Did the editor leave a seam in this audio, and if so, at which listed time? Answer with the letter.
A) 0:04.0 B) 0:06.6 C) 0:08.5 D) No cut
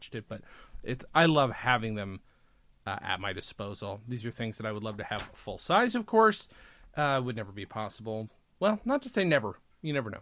D